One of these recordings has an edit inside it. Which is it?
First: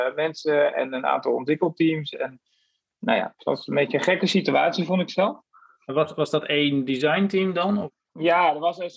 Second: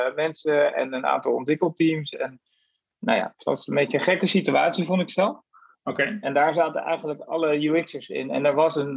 second; 1 cut; at 5.7 s

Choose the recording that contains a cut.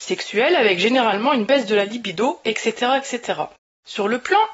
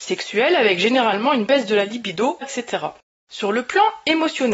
second; 1 cut; at 2.4 s

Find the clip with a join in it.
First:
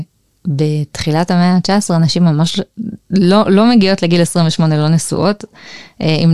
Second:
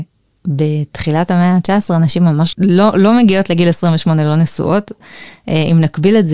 second; 1 cut; at 2.5 s

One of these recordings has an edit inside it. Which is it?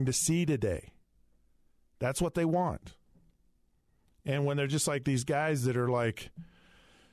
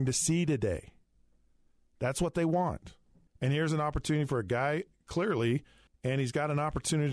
second; 2 cuts; at 3.3 s, 5.9 s

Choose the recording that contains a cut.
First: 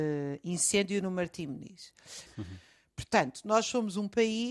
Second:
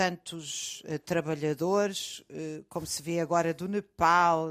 first; 1 cut; at 2.3 s

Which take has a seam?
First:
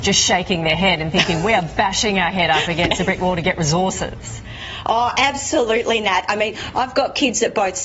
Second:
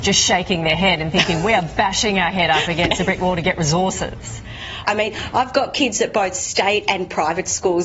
second; 1 cut; at 4.8 s

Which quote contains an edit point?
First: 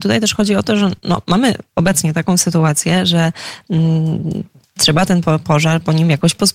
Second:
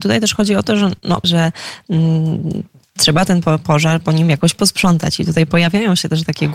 second; 1 cut; at 1.2 s

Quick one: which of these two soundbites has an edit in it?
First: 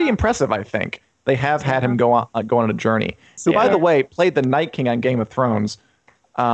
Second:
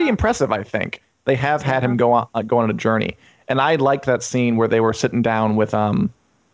first; 1 cut; at 3.4 s

